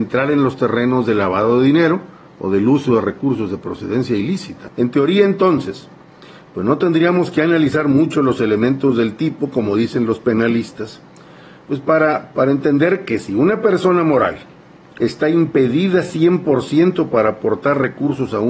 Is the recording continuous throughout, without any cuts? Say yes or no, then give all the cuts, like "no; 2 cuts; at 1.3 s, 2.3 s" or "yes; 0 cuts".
no; 2 cuts; at 4.7 s, 12.3 s